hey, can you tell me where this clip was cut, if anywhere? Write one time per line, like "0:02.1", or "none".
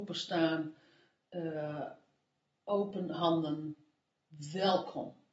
none